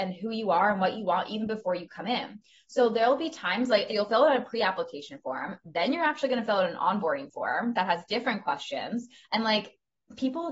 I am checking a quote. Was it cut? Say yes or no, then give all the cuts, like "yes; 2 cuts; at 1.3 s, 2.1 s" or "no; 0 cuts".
yes; 1 cut; at 3.9 s